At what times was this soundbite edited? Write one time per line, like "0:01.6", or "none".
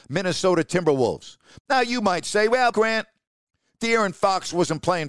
0:01.6
0:02.7